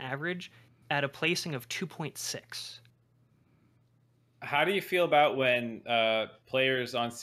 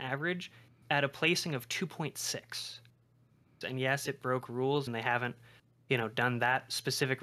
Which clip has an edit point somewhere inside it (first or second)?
second